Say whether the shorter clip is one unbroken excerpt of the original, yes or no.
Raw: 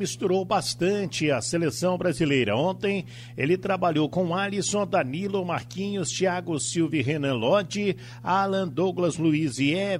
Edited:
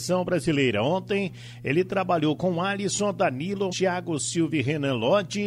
no